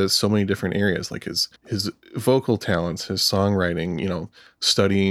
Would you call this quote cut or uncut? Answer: cut